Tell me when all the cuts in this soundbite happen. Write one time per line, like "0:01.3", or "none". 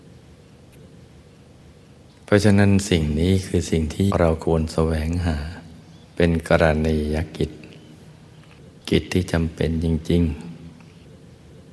0:04.1
0:06.0
0:08.8